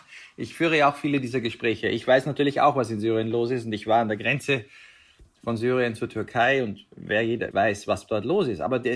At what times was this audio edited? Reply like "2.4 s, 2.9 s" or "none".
7.5 s

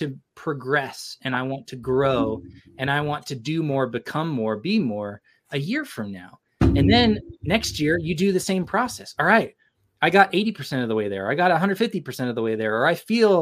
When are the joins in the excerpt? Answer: none

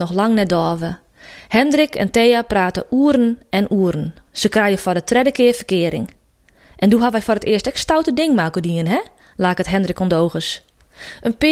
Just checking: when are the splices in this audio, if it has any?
none

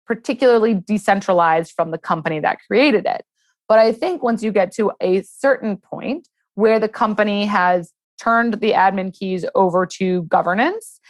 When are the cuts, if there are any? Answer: none

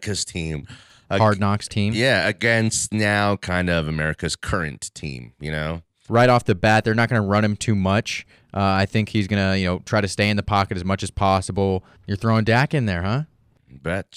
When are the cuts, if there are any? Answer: 6.1 s, 12.0 s

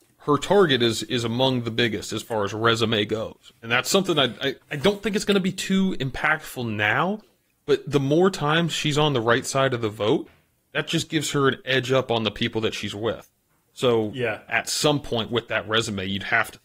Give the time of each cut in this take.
4.6 s, 14.5 s

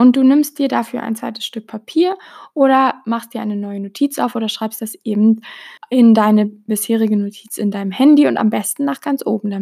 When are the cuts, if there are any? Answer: 5.8 s

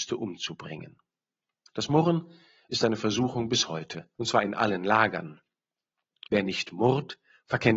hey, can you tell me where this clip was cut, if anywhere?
4.2 s, 6.3 s

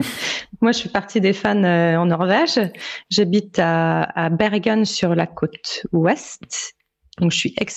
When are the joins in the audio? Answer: none

